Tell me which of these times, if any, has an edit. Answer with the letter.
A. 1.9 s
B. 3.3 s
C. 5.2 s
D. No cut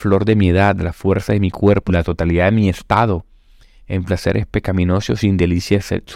A